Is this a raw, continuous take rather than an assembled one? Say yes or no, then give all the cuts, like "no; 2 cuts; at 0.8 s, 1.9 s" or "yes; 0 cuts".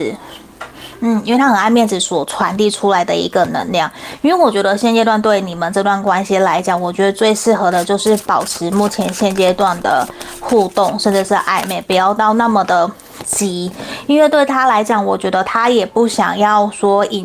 yes; 0 cuts